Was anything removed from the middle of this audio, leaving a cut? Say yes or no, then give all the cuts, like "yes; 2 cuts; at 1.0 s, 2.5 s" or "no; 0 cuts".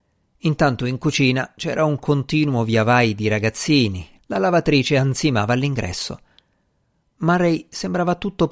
yes; 1 cut; at 4.2 s